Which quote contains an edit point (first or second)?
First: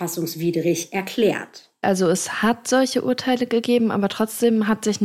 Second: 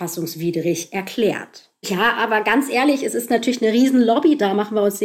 second